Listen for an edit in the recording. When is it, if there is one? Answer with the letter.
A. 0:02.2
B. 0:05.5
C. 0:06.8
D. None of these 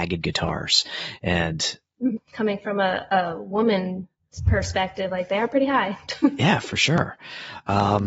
A